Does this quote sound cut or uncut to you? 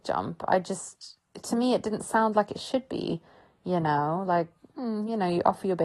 uncut